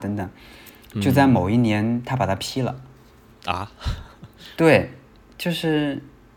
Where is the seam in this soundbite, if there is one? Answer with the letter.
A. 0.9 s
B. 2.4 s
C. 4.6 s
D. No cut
D